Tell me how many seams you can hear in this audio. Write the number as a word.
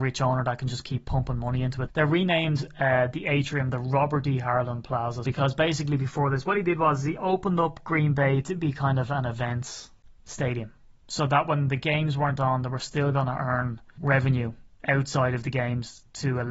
three